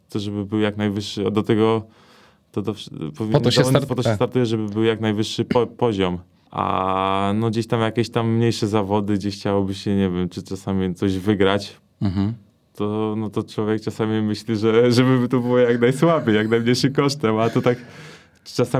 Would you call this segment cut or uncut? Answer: cut